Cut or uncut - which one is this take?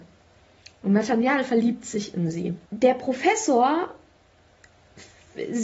cut